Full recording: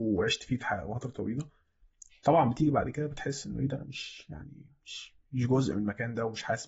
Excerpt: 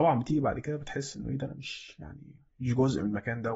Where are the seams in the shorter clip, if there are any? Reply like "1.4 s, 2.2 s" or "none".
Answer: 2.5 s